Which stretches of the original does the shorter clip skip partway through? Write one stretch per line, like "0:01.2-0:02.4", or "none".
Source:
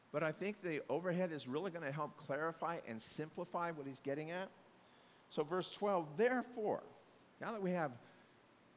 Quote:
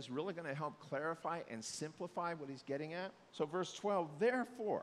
0:04.7-0:05.3